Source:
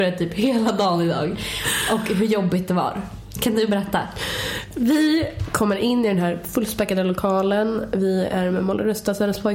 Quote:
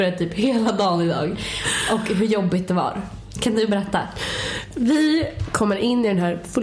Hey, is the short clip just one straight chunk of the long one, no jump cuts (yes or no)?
yes